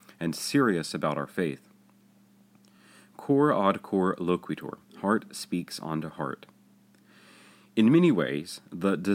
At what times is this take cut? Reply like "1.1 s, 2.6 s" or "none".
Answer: none